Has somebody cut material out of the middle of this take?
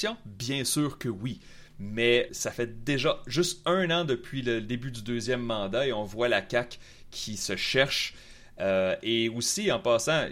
yes; 1 cut; at 2.3 s

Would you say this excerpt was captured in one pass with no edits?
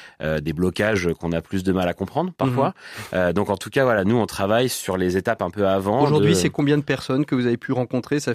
yes; 0 cuts

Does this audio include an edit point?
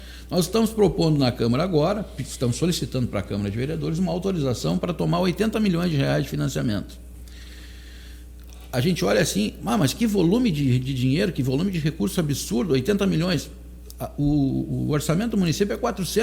no; 0 cuts

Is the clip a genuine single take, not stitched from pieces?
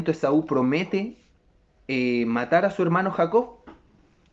yes; 0 cuts

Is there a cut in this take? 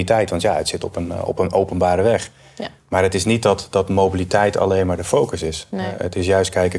no; 0 cuts

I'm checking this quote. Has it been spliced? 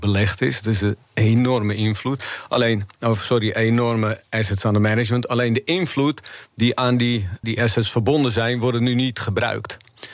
yes; 1 cut; at 7.4 s

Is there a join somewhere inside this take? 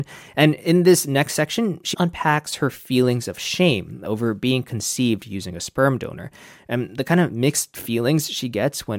yes; 1 cut; at 1.9 s

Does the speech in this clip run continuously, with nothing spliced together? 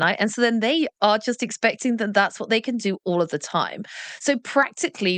yes; 0 cuts

